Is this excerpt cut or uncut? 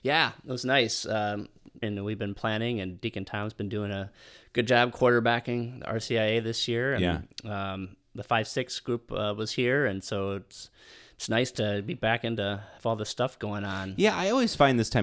cut